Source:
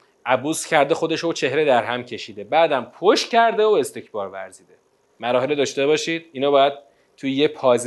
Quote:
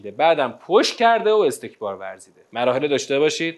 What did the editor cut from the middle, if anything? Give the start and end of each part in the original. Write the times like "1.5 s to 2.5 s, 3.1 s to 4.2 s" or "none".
4.8 s to 5.1 s